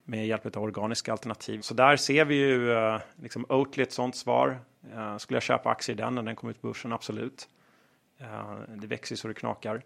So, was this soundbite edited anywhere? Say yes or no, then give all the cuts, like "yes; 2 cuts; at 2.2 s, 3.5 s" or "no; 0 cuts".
yes; 1 cut; at 1.6 s